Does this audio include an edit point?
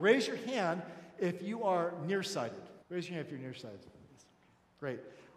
yes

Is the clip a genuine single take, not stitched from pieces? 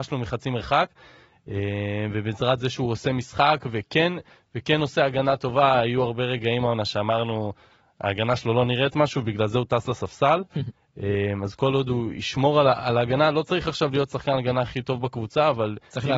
yes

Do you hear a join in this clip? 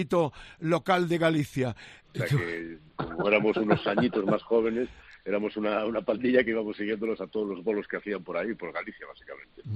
yes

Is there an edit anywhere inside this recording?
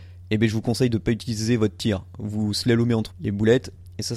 yes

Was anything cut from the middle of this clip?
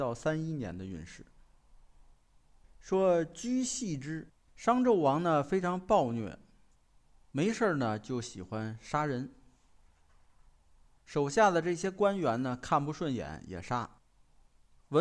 yes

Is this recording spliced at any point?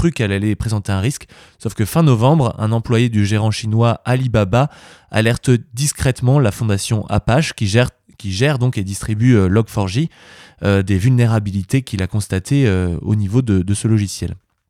no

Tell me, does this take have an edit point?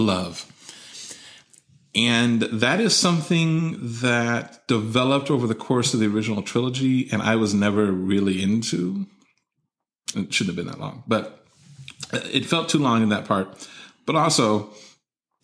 yes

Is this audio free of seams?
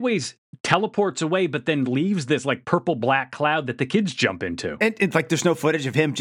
yes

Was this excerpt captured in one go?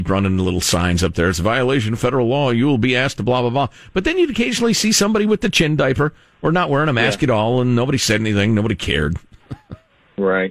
yes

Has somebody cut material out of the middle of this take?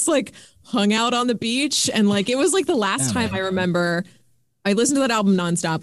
no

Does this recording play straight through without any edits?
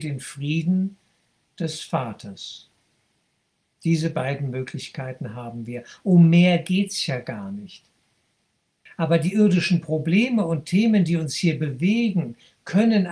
no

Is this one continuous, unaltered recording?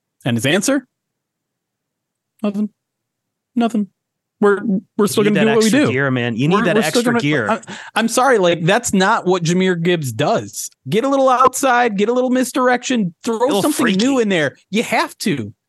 no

